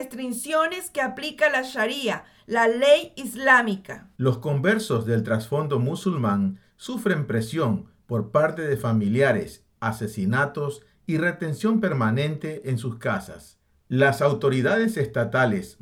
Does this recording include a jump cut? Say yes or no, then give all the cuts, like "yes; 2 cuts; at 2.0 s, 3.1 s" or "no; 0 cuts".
yes; 2 cuts; at 4.1 s, 9.7 s